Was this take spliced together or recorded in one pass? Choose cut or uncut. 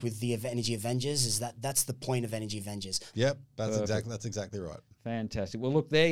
cut